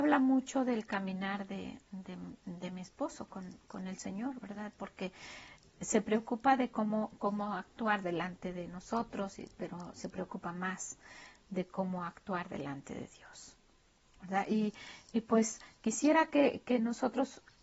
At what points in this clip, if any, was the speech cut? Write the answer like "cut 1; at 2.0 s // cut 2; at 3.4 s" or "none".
none